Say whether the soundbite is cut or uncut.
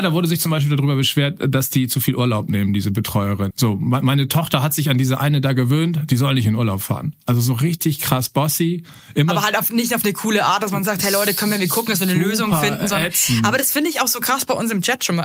cut